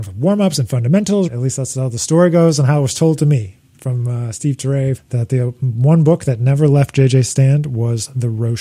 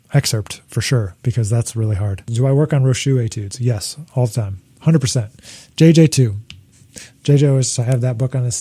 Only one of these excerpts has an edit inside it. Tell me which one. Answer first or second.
first